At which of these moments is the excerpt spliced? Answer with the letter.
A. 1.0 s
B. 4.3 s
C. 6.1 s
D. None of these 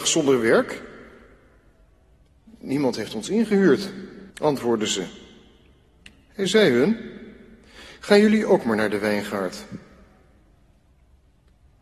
B